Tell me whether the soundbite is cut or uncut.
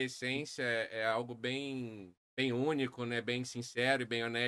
cut